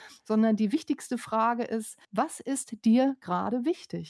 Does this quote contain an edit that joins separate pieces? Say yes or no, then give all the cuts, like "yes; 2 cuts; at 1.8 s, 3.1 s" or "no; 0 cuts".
yes; 1 cut; at 2.0 s